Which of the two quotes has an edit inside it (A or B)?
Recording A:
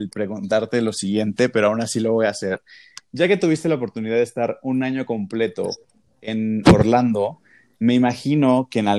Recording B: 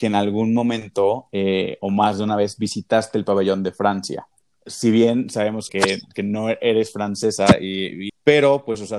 B